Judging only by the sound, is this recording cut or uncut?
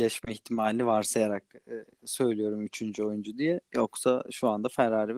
uncut